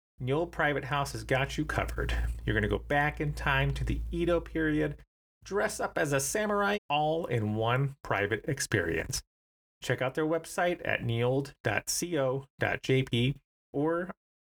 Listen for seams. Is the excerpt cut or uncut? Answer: cut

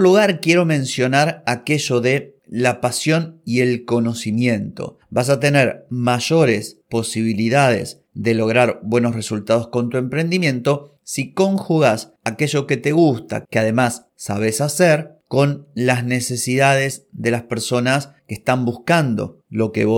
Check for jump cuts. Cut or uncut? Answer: cut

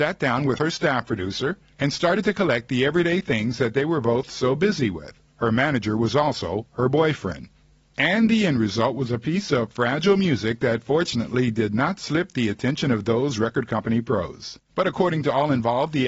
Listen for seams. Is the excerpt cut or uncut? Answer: cut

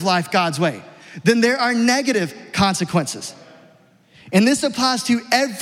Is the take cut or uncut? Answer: uncut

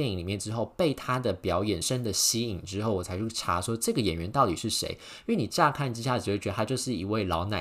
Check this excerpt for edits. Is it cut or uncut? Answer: cut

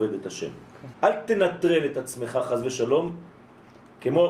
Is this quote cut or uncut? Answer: cut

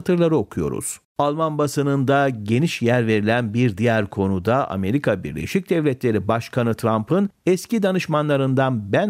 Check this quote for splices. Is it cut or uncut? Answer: cut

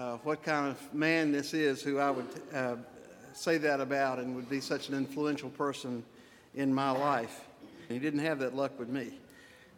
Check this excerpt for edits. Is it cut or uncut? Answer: cut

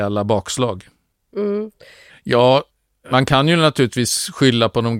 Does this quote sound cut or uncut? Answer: cut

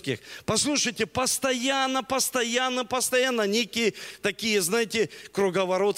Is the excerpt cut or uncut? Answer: uncut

